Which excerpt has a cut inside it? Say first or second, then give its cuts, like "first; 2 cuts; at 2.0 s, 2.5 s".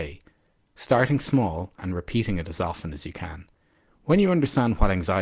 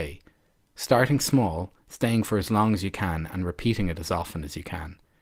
first; 2 cuts; at 1.8 s, 3.9 s